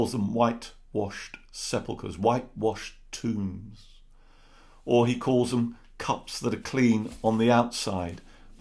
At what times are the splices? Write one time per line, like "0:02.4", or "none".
none